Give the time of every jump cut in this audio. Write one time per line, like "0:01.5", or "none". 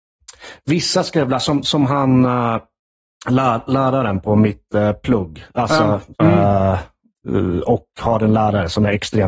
0:06.1